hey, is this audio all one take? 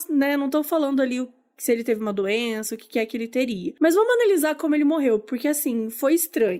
yes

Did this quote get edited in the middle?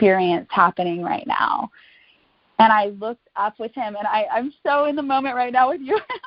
no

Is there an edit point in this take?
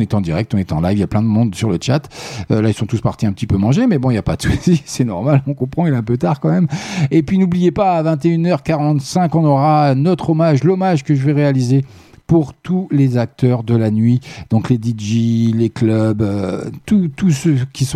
no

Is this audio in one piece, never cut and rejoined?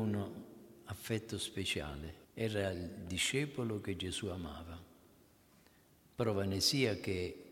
no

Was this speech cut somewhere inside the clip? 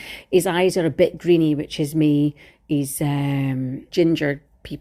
yes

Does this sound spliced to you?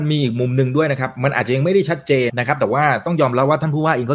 yes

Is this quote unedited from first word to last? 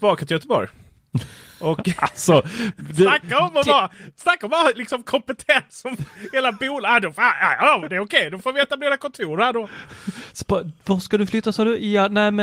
yes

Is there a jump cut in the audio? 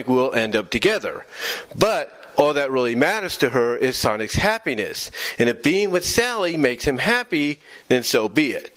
no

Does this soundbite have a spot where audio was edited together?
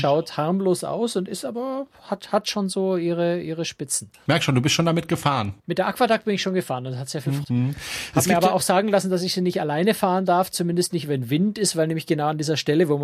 yes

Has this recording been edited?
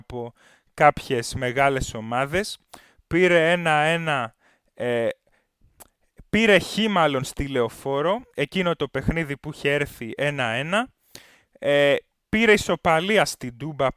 no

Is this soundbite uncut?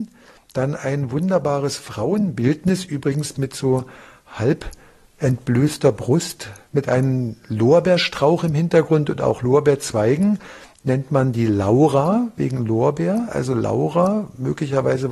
yes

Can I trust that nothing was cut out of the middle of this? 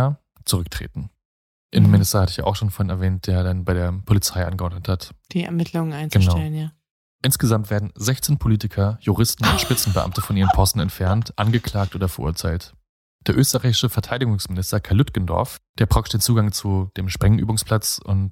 yes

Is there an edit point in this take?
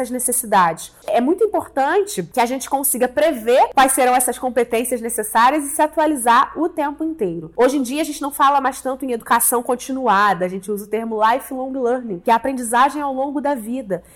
yes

